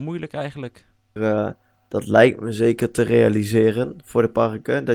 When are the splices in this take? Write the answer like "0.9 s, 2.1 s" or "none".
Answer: 1.2 s

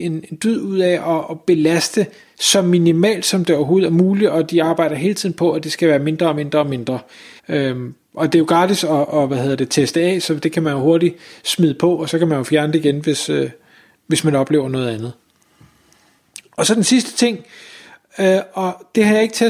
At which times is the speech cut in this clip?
7.4 s

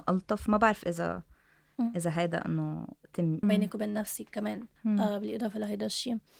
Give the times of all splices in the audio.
3.4 s, 4.8 s

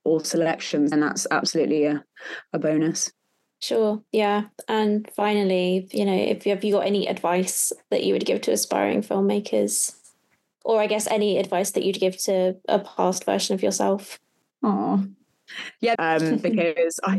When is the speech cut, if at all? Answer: 0.9 s, 15.9 s

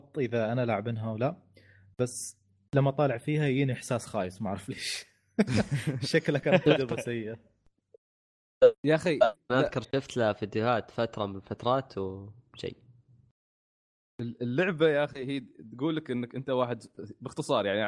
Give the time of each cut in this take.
9.8 s

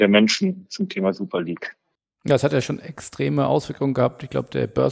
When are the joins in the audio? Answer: none

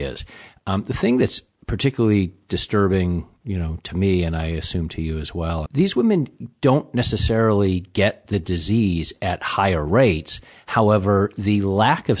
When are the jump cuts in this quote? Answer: 5.7 s

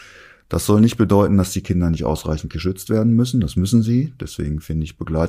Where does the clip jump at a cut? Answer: none

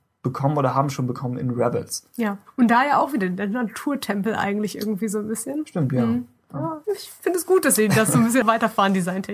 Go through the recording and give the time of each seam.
6.8 s, 8.4 s

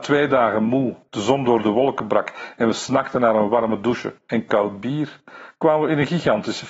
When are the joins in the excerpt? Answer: 1.1 s

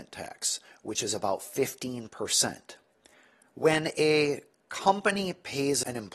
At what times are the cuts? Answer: 3.5 s

